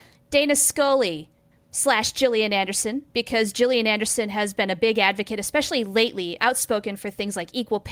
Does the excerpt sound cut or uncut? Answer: cut